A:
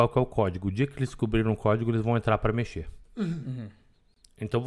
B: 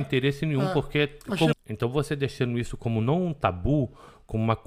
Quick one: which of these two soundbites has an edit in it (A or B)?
B